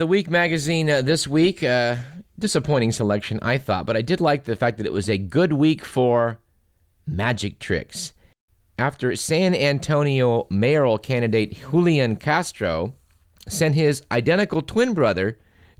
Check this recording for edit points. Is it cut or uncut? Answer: uncut